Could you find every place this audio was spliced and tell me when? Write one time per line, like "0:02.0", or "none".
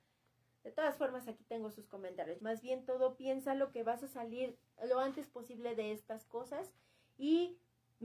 0:02.4